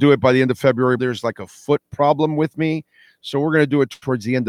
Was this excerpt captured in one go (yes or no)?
no